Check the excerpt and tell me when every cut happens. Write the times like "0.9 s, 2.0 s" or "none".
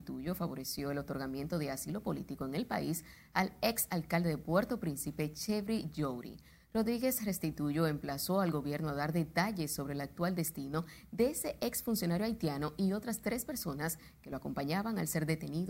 none